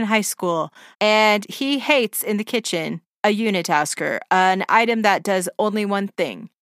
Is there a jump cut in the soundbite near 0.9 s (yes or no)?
yes